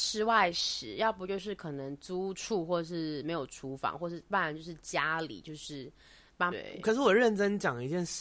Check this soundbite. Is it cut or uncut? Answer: cut